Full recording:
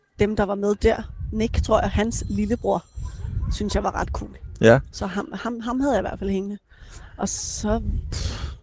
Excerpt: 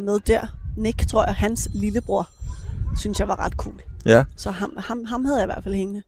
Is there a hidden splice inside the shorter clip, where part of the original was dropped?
no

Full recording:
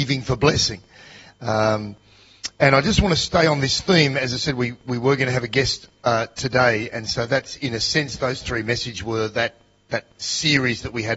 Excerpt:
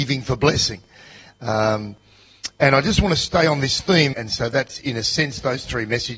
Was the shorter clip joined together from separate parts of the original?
yes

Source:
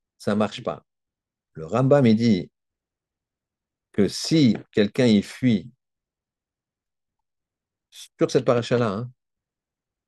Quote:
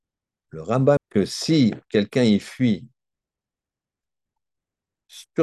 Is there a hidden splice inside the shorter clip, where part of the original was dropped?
yes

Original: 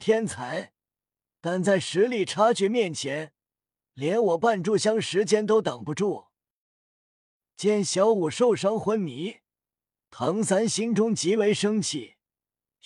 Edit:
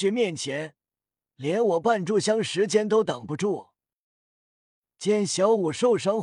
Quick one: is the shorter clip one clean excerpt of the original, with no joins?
yes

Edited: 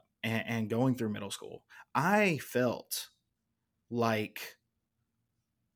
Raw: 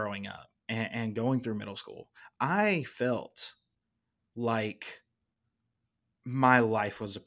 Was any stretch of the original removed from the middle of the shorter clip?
no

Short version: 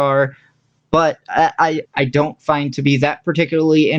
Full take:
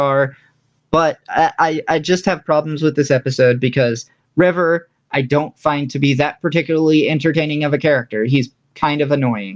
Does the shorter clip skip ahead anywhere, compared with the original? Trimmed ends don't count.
yes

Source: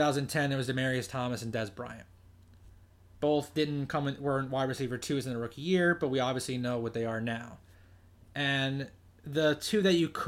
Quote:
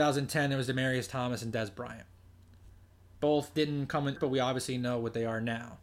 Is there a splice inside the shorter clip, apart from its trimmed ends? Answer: yes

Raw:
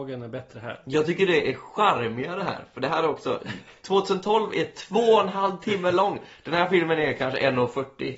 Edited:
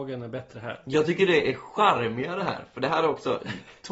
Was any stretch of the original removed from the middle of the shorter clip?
no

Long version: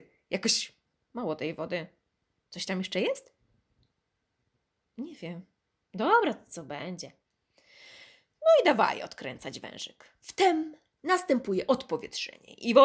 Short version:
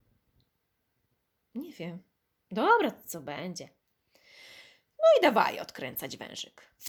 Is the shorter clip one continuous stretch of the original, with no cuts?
yes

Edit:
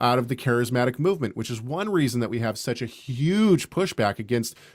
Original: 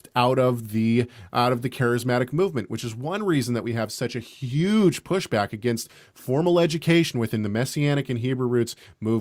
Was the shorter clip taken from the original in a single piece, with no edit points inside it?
yes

